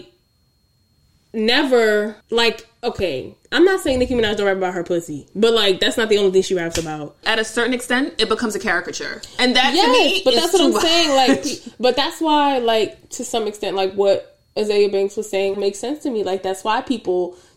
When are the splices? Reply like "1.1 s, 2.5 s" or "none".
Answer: 2.2 s, 7.2 s, 15.5 s